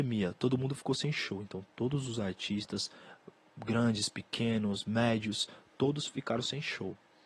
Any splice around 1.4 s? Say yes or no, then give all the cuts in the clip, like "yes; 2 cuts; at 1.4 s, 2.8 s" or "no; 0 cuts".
no; 0 cuts